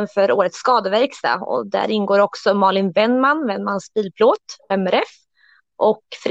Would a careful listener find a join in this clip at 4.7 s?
yes; 1 cut; at 4.7 s

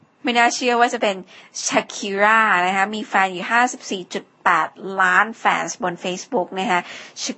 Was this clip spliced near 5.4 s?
no; 0 cuts

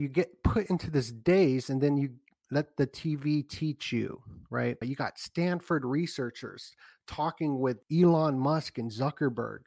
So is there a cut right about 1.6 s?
no; 2 cuts; at 4.8 s, 7.8 s

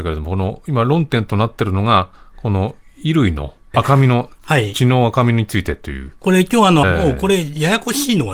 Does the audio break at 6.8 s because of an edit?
yes; 2 cuts; at 3.7 s, 6.8 s

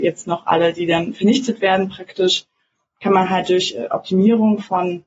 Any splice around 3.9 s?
no; 0 cuts

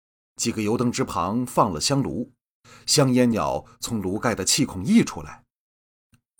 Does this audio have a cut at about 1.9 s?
no; 1 cut; at 3.3 s

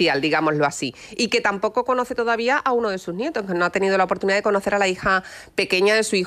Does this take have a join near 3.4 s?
no; 0 cuts

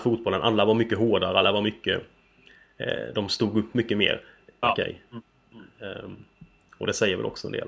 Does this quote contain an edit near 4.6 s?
yes; 1 cut; at 4.6 s

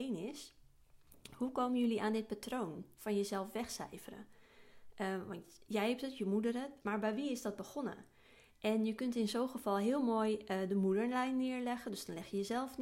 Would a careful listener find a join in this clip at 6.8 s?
yes; 1 cut; at 6.8 s

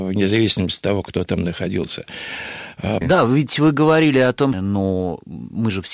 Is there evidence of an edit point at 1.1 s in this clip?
no; 2 cuts; at 3.0 s, 4.5 s

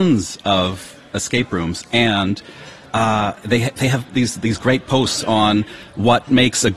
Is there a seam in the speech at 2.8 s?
no; 0 cuts

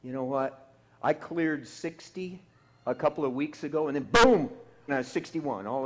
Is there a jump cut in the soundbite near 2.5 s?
no; 1 cut; at 4.9 s

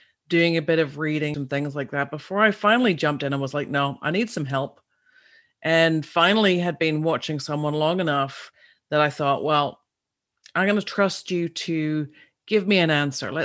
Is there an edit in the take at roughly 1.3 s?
yes; 1 cut; at 1.3 s

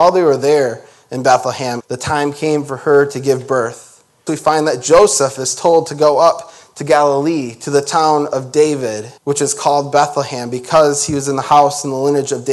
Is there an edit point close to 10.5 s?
no; 3 cuts; at 1.8 s, 4.3 s, 9.2 s

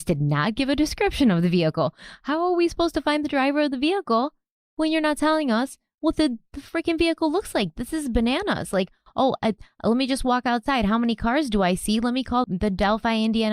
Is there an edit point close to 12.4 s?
yes; 1 cut; at 12.4 s

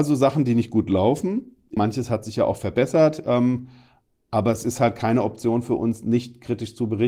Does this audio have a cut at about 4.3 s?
no; 1 cut; at 1.8 s

